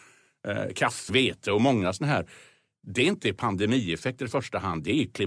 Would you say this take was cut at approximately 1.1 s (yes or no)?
yes